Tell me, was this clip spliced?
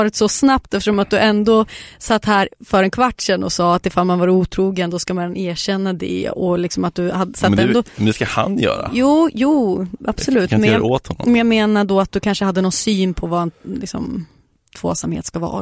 no; 0 cuts

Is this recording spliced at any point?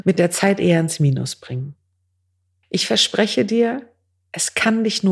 no; 0 cuts

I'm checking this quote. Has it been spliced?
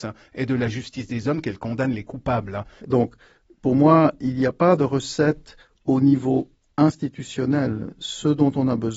yes; 1 cut; at 2.8 s

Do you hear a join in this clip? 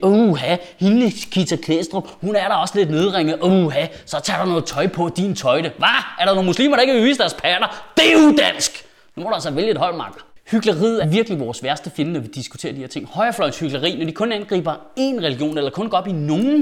yes; 1 cut; at 11.0 s

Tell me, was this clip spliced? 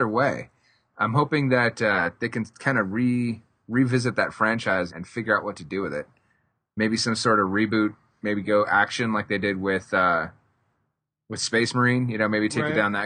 yes; 1 cut; at 4.9 s

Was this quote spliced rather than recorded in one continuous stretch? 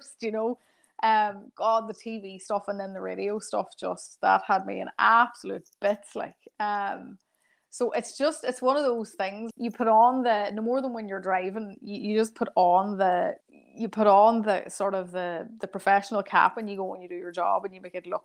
yes; 2 cuts; at 9.5 s, 13.4 s

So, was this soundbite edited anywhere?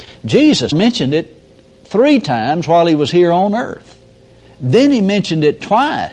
no; 0 cuts

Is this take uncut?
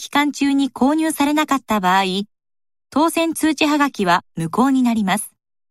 yes; 0 cuts

